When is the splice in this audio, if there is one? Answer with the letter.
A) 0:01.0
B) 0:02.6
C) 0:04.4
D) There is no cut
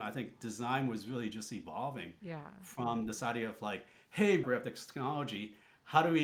C